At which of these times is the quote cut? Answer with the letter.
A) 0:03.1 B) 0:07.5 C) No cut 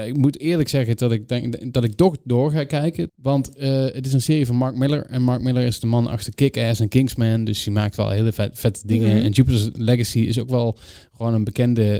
A